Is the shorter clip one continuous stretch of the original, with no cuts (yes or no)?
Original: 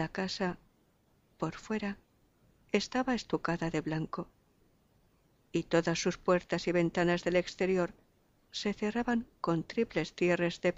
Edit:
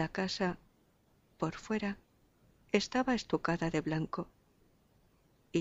yes